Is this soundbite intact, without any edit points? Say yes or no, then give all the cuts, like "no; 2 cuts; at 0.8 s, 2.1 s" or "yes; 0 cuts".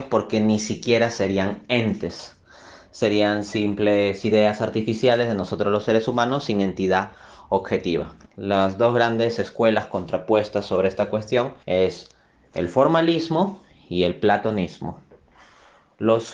no; 2 cuts; at 8.3 s, 11.6 s